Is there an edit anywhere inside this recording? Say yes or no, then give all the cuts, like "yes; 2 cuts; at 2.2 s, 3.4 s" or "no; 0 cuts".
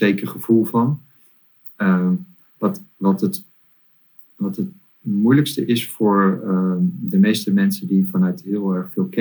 no; 0 cuts